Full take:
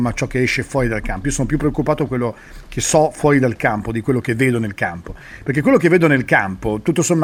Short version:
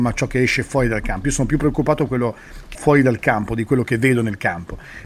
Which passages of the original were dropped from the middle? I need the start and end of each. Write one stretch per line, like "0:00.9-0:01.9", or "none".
0:02.7-0:03.1